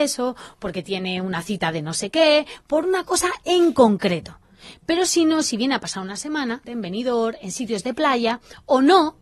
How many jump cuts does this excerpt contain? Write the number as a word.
one